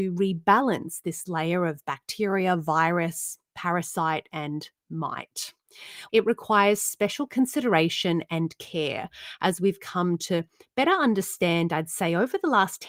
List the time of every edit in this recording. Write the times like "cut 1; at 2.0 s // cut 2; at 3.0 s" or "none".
cut 1; at 6.1 s